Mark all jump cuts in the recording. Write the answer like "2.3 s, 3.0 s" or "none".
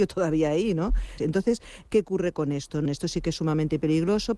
1.2 s, 2.8 s